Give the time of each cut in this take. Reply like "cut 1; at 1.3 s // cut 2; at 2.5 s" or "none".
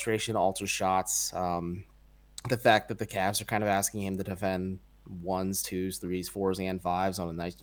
none